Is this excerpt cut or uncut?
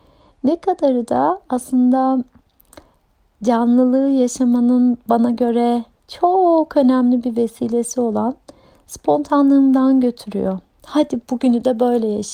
uncut